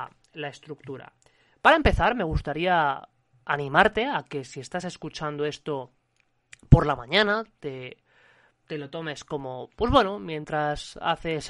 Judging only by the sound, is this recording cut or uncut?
uncut